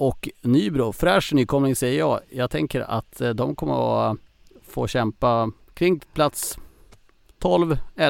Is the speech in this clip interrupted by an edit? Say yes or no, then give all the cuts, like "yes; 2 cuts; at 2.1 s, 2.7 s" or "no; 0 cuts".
no; 0 cuts